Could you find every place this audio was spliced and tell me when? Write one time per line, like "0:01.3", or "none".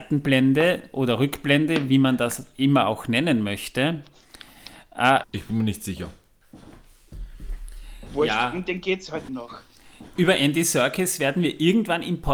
0:05.2
0:09.3